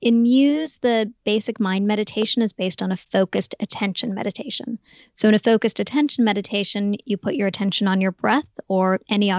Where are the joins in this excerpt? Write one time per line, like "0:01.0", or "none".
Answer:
none